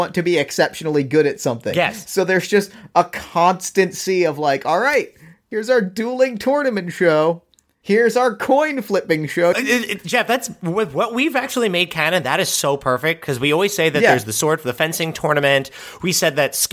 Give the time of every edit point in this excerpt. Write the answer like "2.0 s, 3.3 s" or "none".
9.5 s